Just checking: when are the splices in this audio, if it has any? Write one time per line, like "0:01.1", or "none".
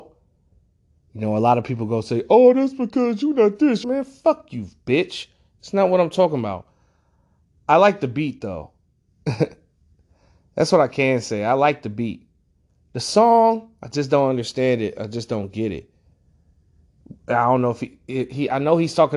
0:03.8